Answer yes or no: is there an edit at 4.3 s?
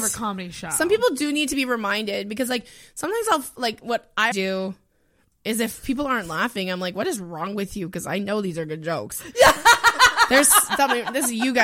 yes